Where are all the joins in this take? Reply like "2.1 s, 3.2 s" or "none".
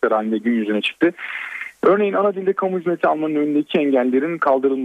none